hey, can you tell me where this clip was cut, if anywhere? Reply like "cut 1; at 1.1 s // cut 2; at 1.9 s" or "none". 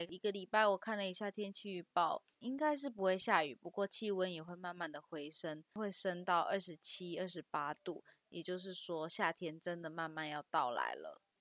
none